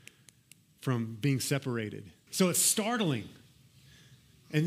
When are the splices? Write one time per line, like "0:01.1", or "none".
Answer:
0:02.3